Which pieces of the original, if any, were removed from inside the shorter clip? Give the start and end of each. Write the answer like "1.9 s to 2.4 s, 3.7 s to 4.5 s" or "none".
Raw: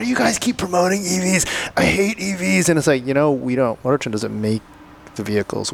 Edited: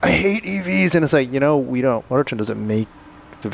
none